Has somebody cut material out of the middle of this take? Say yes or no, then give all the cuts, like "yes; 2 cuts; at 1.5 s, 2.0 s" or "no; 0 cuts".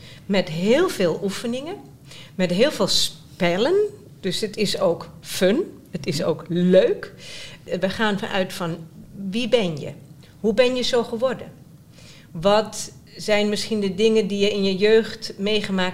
no; 0 cuts